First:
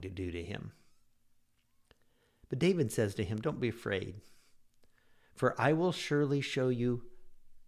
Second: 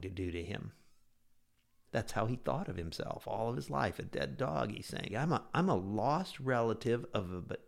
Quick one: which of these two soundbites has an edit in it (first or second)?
second